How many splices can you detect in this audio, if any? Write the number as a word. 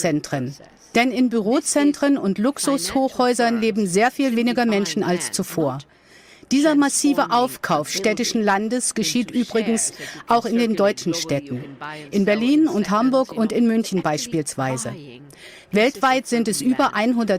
zero